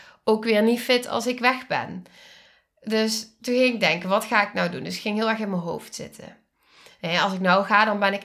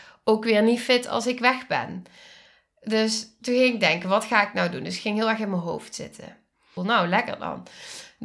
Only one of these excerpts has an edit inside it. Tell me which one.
second; 1 cut; at 6.8 s

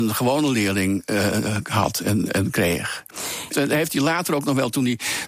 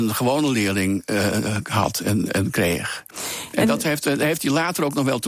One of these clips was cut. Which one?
first; 1 cut; at 3.5 s

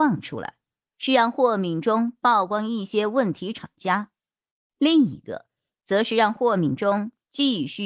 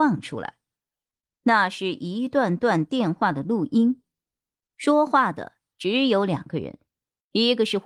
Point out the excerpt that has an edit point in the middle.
first; 1 cut; at 0.9 s

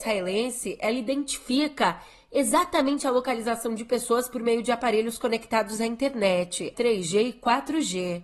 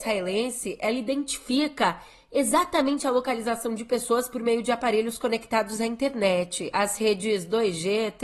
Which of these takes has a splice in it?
first; 1 cut; at 6.7 s

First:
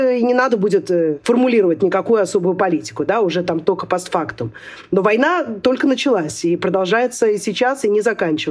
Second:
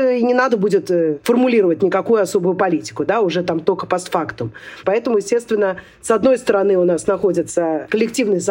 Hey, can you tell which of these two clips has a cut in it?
second; 1 cut; at 4.8 s

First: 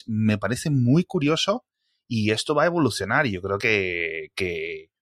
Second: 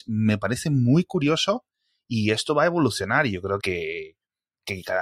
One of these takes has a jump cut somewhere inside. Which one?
second; 1 cut; at 3.6 s

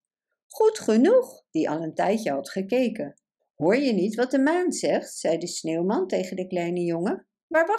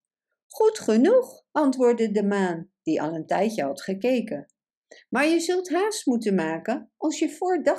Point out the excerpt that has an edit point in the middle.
first; 2 cuts; at 1.5 s, 3.4 s

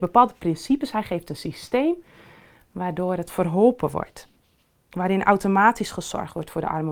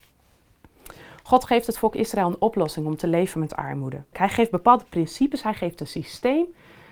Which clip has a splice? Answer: second; 1 cut; at 4.1 s

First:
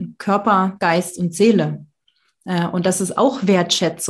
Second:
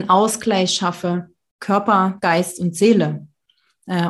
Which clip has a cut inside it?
second; 1 cut; at 1.6 s

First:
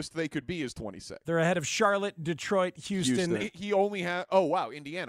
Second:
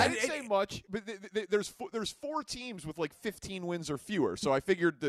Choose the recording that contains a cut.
first; 2 cuts; at 1.2 s, 3.4 s

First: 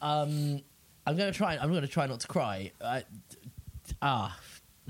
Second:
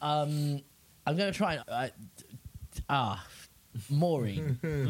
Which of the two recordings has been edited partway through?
second; 1 cut; at 1.6 s

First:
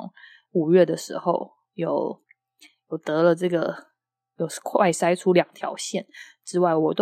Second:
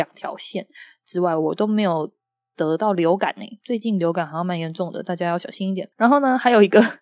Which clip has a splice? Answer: second; 1 cut; at 5.9 s

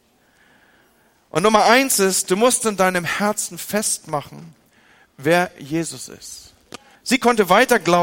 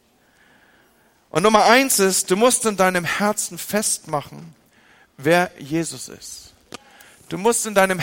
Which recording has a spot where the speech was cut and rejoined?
first; 1 cut; at 7.0 s

